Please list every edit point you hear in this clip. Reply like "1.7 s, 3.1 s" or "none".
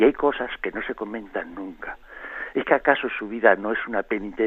2.5 s